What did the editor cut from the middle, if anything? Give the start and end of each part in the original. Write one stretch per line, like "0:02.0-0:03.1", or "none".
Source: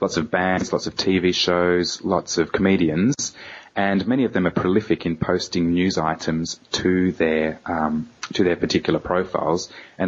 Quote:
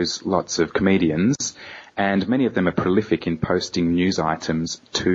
none